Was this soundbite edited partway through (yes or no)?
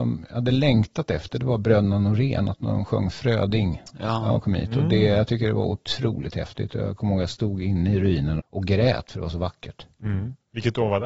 yes